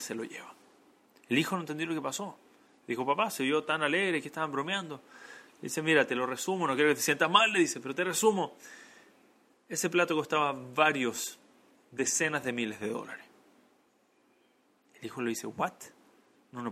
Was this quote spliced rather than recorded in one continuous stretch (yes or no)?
no